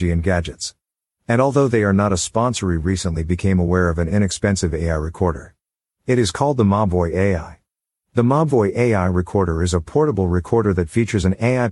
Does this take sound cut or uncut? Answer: uncut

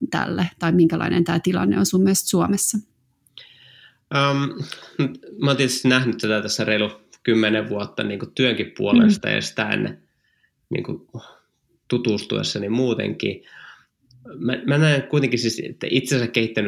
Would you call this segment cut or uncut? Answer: uncut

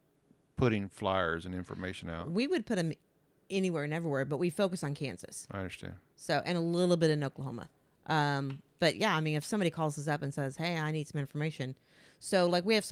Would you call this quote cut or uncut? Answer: uncut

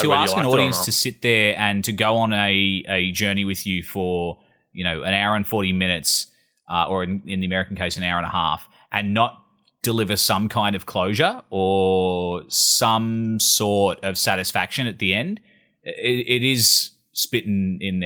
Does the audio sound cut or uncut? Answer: uncut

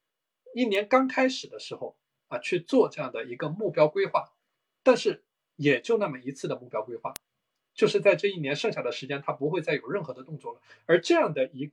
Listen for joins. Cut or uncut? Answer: uncut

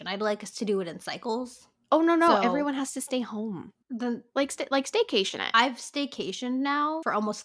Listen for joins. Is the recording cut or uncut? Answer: uncut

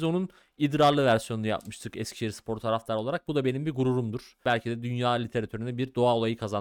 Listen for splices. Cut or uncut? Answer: uncut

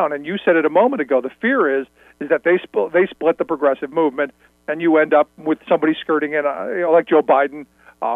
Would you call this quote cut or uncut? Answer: uncut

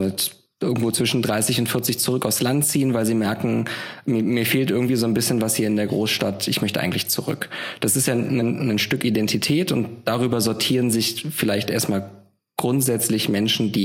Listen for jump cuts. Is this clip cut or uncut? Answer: uncut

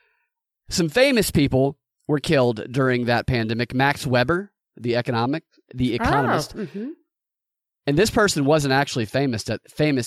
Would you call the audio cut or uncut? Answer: uncut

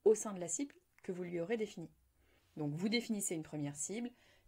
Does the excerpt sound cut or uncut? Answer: cut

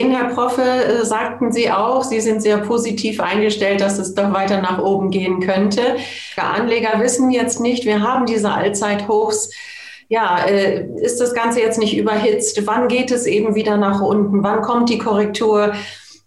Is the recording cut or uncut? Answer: cut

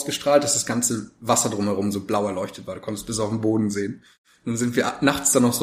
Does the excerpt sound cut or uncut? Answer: uncut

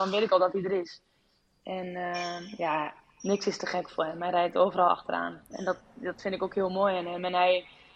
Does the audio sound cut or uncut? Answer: uncut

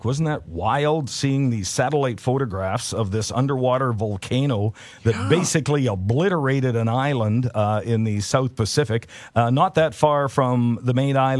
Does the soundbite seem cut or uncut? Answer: uncut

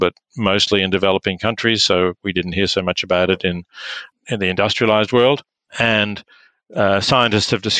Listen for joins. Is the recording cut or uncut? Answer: cut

